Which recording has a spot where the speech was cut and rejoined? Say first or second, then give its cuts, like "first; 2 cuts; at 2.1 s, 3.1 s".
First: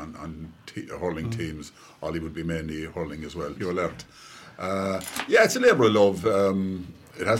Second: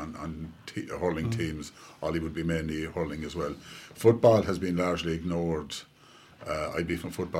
first; 1 cut; at 3.6 s